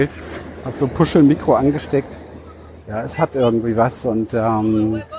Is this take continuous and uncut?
no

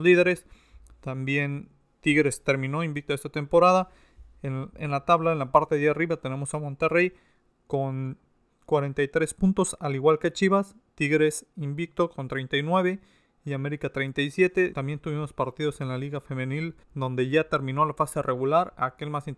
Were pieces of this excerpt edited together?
yes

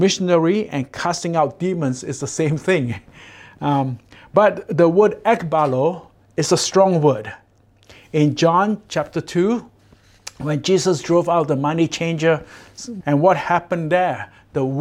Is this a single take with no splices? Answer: no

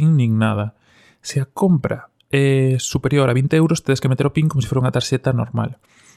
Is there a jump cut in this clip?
no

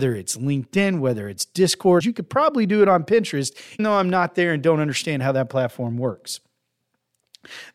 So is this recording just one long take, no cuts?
no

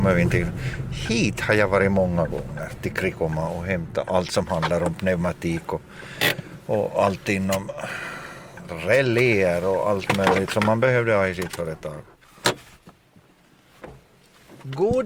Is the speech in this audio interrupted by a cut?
no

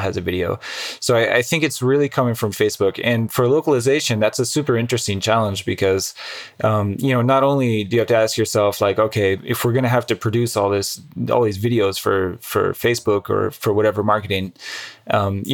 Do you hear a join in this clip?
no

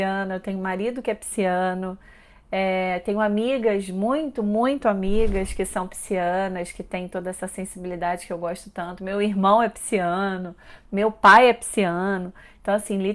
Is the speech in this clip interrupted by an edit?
no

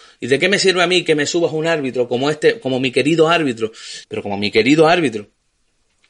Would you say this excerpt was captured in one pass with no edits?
no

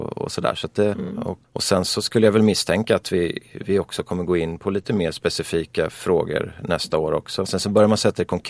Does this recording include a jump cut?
yes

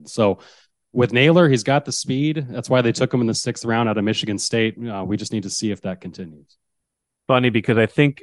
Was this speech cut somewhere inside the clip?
no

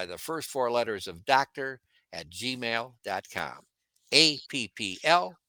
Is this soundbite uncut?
yes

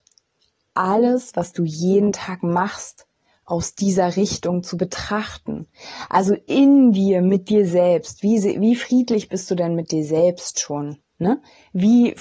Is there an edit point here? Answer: no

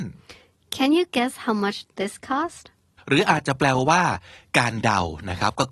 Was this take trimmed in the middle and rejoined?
yes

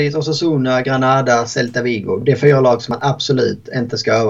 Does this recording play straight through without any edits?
yes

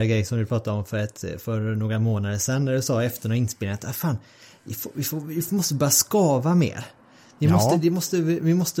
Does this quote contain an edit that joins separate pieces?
no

